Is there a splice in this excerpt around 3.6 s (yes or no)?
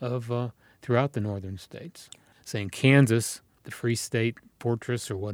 yes